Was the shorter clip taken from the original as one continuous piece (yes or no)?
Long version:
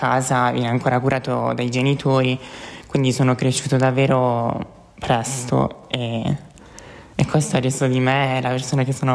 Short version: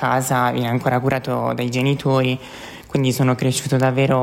yes